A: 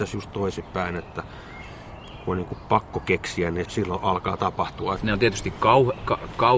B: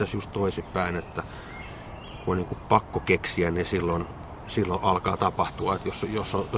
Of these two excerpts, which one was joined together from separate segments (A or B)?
A